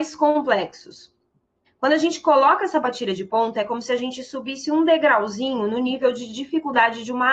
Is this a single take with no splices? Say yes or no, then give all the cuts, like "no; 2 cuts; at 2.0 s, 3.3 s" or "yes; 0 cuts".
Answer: no; 1 cut; at 1.7 s